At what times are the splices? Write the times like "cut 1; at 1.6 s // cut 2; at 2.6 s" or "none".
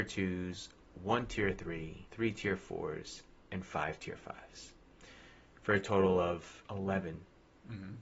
none